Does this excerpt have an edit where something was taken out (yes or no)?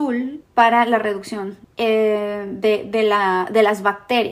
no